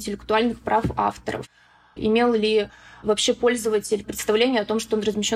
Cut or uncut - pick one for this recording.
cut